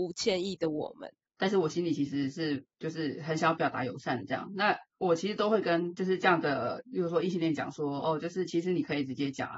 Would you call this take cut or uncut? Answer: cut